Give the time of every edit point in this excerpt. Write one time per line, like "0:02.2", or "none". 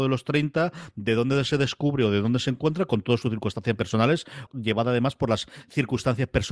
0:04.5